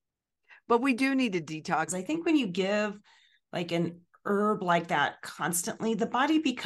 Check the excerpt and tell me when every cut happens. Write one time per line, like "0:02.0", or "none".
0:01.9